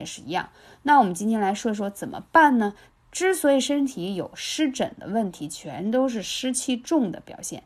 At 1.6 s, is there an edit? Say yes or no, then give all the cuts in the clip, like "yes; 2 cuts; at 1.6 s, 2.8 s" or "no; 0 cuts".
no; 1 cut; at 2.9 s